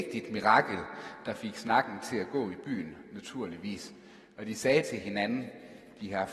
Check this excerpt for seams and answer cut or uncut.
uncut